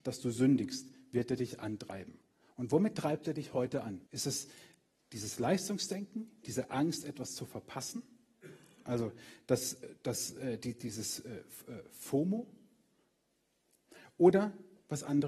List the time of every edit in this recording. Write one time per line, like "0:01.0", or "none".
0:04.1